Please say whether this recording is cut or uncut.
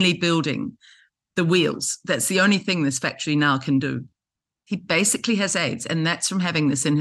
uncut